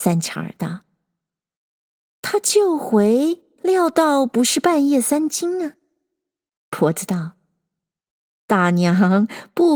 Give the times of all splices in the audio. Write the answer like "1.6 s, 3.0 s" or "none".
none